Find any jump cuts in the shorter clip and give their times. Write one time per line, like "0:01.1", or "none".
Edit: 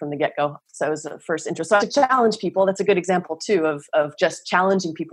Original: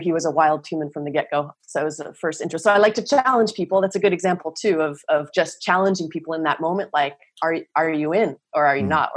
0:01.8